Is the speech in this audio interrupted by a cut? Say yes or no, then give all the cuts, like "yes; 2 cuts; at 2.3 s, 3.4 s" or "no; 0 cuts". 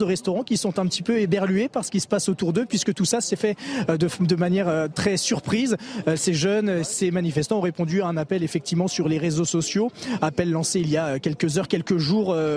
no; 0 cuts